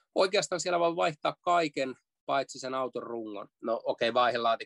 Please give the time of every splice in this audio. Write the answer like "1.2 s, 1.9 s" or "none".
3.5 s

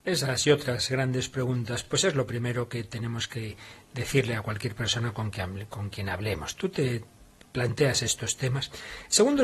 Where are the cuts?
none

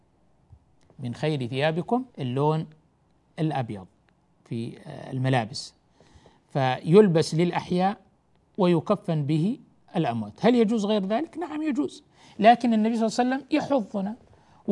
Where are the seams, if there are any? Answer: 2.1 s

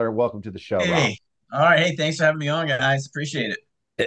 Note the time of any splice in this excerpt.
none

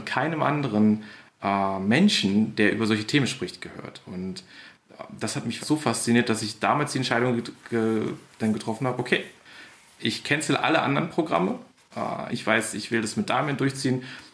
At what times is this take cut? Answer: 5.6 s, 12.3 s

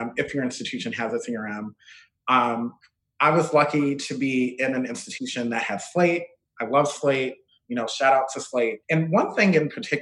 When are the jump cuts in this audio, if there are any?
8.8 s

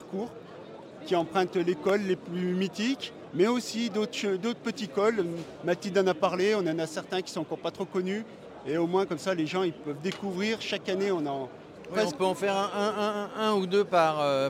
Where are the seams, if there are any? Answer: none

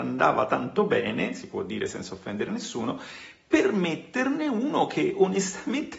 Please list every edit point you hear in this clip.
none

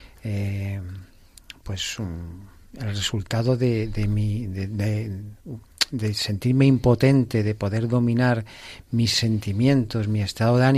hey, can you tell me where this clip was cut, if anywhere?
none

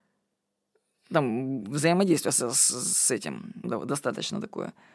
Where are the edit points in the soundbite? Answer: 3.6 s

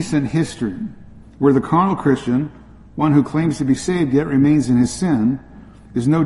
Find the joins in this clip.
1.2 s

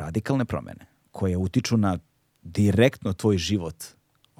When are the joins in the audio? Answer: none

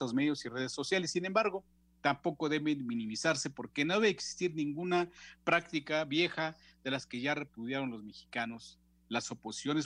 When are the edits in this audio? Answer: none

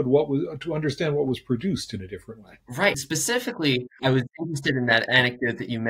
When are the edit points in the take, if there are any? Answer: 2.6 s, 4.0 s

